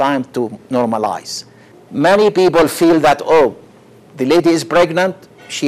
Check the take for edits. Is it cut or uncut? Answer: cut